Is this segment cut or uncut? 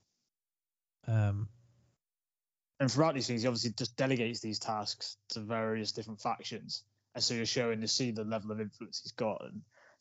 uncut